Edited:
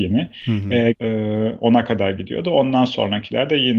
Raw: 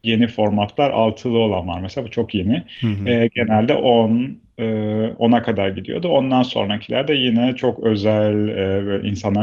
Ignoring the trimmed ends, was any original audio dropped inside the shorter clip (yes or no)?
yes